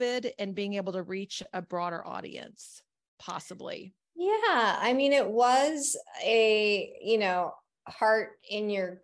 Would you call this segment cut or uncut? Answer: uncut